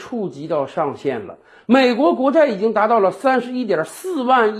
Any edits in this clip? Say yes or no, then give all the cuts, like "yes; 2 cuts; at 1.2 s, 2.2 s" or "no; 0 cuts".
no; 0 cuts